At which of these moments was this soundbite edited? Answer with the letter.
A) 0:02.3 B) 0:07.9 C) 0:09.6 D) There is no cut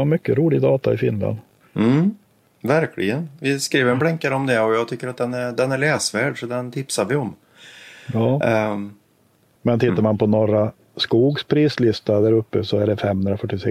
C